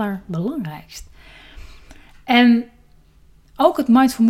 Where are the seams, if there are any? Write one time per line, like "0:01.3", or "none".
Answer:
none

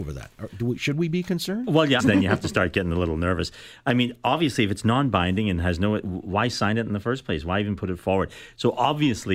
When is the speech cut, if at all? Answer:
0:02.0

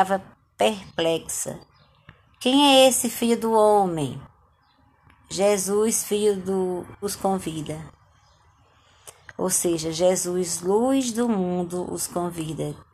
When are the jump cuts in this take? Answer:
0:07.0

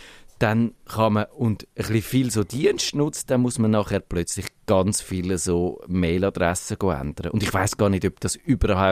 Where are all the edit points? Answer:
none

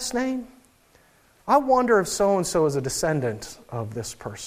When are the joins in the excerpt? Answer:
none

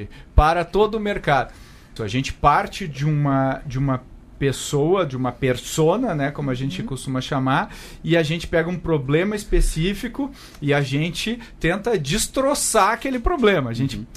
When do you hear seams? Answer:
0:02.0

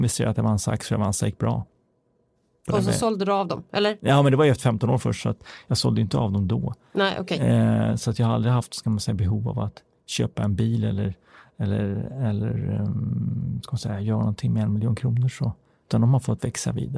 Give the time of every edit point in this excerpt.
none

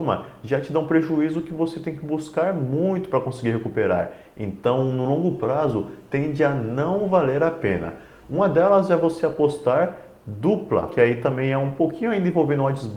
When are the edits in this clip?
0:08.2
0:10.9

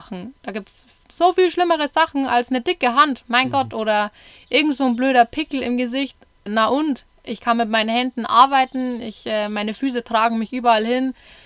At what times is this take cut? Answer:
0:06.5

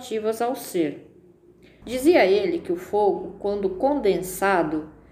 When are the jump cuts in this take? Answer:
0:01.8

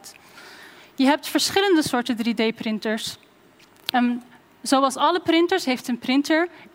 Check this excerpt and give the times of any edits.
0:03.9

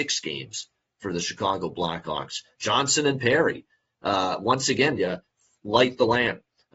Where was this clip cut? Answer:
0:02.5
0:05.0

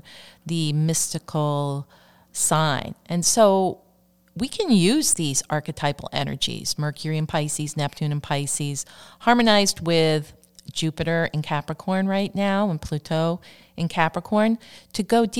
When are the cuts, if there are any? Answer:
none

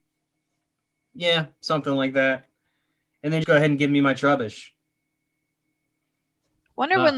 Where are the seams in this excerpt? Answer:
0:03.4

